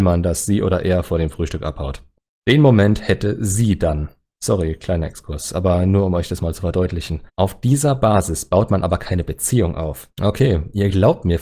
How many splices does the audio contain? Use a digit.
2